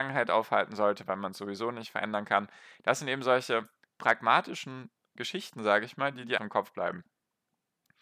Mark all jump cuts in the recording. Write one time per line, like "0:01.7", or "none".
0:06.4